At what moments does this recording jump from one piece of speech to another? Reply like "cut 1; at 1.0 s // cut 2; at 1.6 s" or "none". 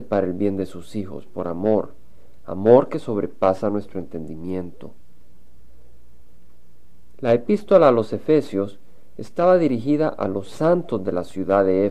none